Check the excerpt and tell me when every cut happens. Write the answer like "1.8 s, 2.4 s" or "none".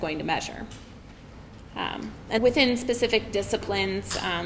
2.4 s